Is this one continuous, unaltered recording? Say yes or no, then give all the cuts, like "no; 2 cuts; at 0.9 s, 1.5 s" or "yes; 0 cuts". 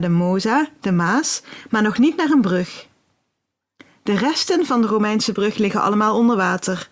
yes; 0 cuts